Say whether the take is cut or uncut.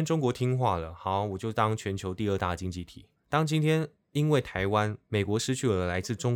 cut